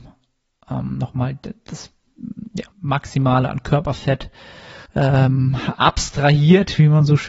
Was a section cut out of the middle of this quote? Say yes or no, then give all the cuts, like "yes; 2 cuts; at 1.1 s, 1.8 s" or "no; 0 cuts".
yes; 2 cuts; at 2.7 s, 4.9 s